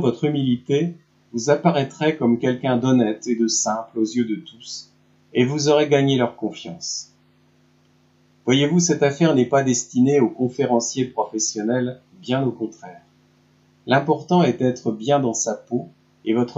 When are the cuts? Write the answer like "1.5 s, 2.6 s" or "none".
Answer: none